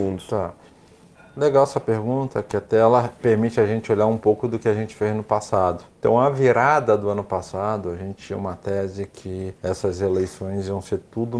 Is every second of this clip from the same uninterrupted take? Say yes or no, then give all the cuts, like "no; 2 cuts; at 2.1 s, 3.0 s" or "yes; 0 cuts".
no; 2 cuts; at 5.9 s, 9.6 s